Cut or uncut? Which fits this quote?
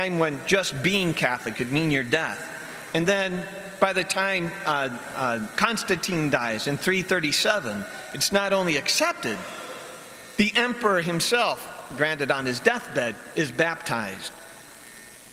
cut